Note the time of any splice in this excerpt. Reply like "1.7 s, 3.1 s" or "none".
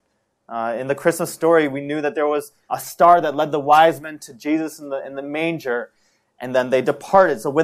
2.7 s